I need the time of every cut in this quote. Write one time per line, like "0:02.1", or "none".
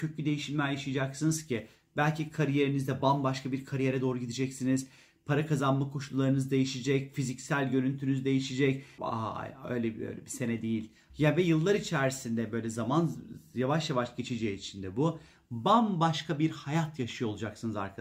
0:09.0
0:11.1